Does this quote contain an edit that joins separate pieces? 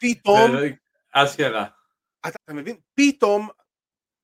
yes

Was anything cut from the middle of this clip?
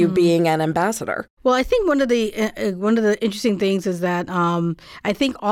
no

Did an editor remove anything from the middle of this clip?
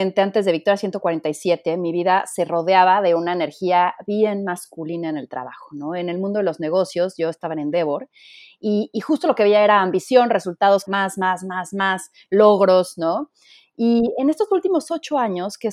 yes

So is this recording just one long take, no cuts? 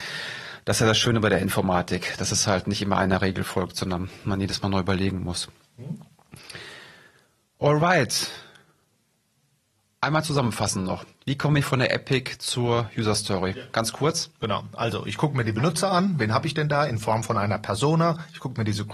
yes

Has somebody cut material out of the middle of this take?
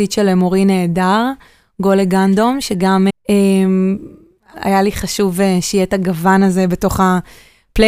yes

